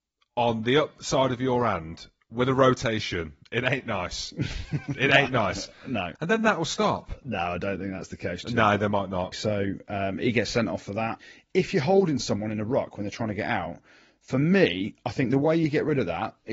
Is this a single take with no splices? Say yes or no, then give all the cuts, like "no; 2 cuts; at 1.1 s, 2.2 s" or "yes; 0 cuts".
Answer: no; 2 cuts; at 6.2 s, 9.3 s